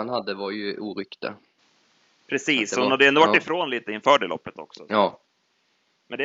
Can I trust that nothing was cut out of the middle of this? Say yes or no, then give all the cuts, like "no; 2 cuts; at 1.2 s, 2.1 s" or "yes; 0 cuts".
yes; 0 cuts